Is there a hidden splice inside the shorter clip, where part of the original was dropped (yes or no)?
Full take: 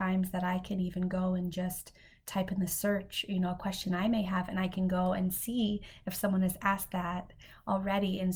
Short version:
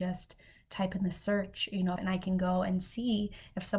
yes